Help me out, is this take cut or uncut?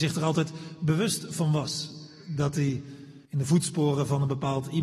cut